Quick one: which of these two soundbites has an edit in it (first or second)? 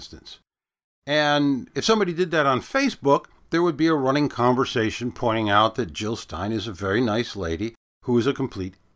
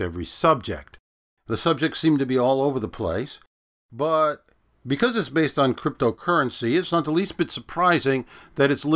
second